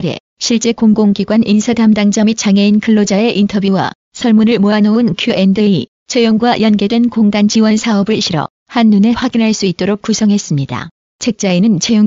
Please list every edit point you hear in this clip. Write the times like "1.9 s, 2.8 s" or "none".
11.1 s